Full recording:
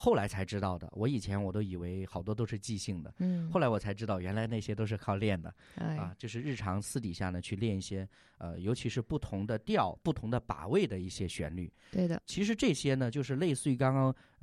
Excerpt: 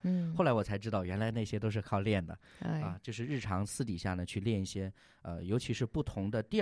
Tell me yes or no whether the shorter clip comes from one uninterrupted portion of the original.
yes